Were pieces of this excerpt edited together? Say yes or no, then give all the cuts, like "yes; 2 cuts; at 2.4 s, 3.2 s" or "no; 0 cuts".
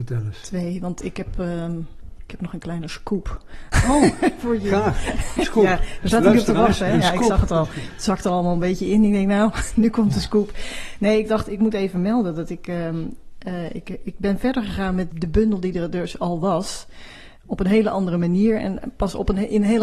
yes; 1 cut; at 15.1 s